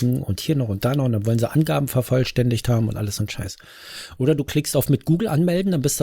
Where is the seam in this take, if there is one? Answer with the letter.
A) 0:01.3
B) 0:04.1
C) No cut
C